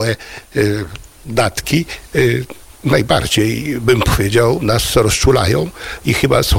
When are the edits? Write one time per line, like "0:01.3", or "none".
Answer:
none